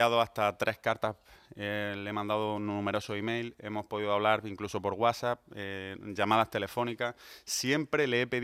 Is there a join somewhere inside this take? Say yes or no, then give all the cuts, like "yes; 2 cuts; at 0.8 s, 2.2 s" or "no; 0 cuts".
no; 0 cuts